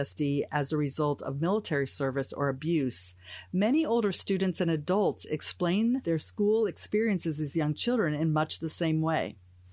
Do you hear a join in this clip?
no; 0 cuts

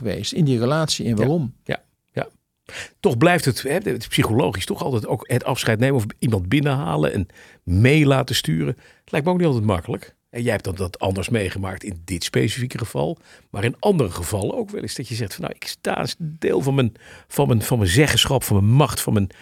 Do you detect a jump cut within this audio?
no; 0 cuts

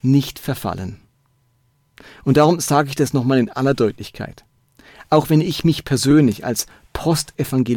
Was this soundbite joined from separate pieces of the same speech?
no; 0 cuts

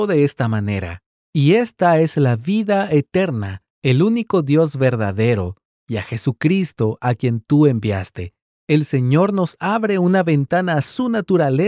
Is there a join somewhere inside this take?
yes; 2 cuts; at 3.7 s, 8.6 s

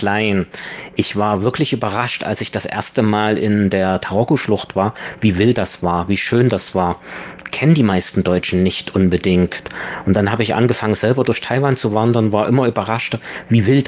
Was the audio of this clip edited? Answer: no; 0 cuts

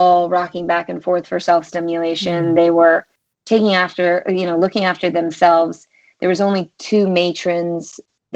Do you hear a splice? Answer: no; 0 cuts

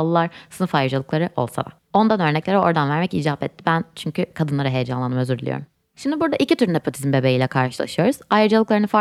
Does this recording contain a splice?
no; 0 cuts

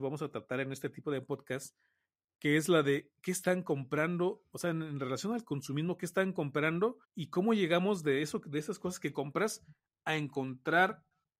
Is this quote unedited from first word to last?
no; 1 cut; at 7.0 s

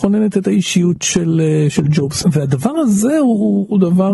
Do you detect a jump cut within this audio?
no; 0 cuts

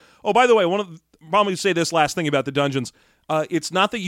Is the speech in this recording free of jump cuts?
yes; 0 cuts

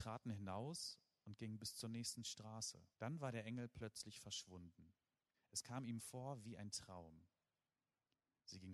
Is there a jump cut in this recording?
yes; 2 cuts; at 2.9 s, 5.3 s

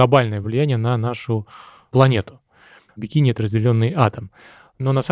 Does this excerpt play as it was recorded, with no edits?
no; 1 cut; at 2.9 s

